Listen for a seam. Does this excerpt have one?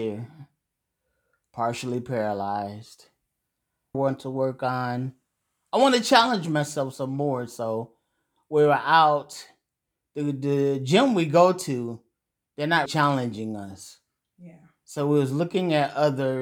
yes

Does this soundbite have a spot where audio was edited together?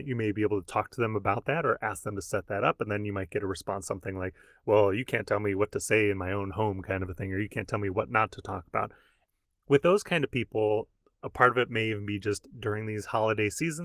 no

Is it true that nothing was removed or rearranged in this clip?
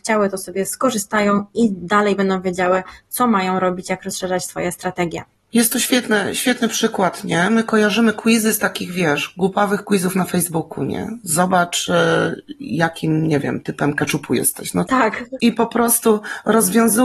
yes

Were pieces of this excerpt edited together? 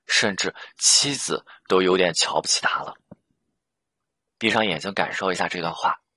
no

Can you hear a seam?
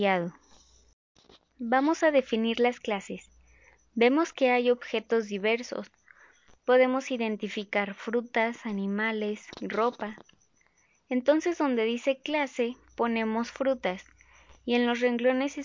yes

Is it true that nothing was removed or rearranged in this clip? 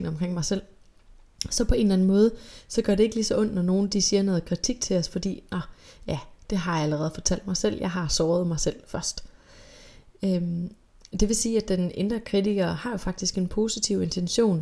no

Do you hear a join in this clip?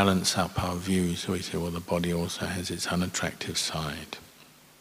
no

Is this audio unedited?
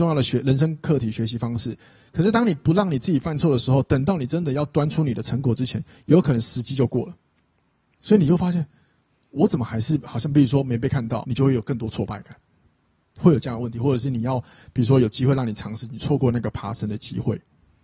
no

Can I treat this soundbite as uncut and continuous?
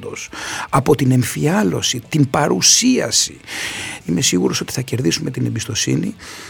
no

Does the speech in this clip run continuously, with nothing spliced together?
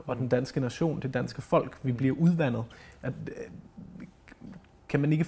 yes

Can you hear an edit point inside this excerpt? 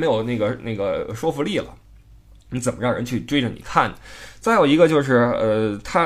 no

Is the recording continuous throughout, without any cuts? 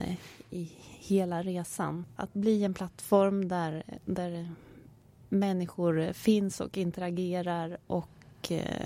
yes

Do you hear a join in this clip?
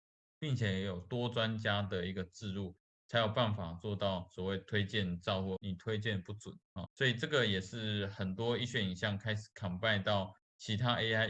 yes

